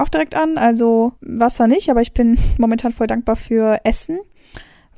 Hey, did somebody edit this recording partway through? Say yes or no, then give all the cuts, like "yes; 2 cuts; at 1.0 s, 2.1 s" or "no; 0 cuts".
yes; 1 cut; at 1.2 s